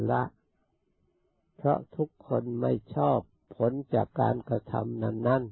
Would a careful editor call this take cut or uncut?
uncut